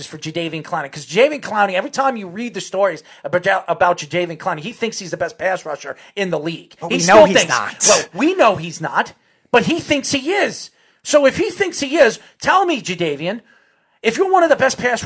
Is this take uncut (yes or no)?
yes